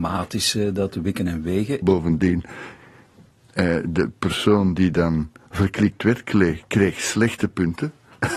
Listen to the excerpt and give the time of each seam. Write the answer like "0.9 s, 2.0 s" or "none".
1.8 s